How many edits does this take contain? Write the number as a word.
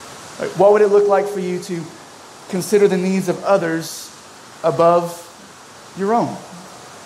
zero